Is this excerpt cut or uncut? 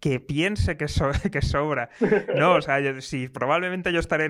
uncut